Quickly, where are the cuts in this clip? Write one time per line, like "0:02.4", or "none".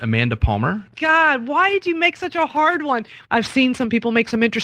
0:00.9
0:03.3